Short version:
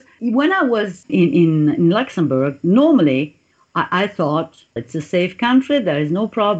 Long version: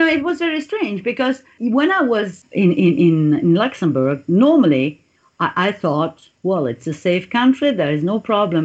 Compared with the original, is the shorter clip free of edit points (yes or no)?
no